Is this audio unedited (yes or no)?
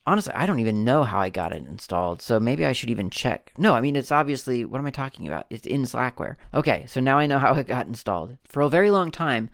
yes